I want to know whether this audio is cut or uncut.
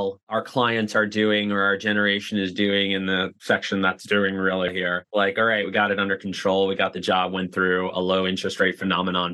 cut